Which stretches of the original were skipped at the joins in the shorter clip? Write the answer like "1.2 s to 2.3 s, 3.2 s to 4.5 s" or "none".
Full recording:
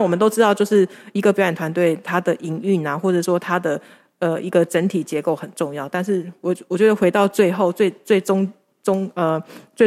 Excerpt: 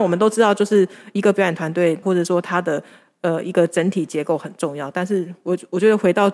2.0 s to 3.0 s